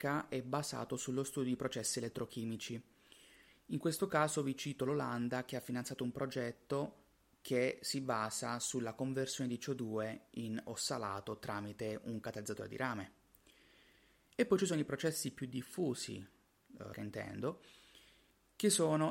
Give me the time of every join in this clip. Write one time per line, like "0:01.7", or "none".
0:16.9